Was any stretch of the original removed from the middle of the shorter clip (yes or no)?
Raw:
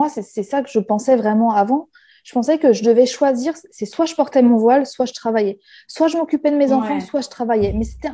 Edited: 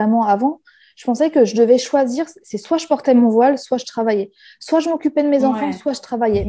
no